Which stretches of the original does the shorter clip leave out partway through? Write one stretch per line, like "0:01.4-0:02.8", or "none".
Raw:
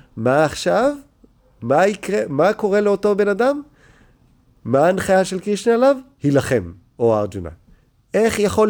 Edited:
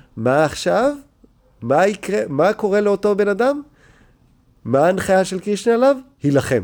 none